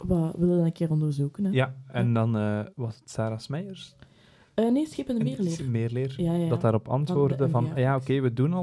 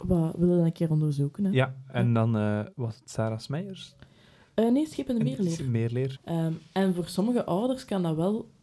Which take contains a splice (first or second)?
second